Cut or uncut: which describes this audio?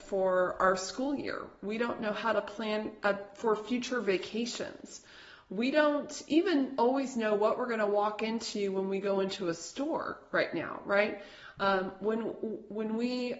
uncut